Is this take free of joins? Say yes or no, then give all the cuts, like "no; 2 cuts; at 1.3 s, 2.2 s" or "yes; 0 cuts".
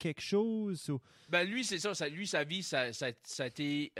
yes; 0 cuts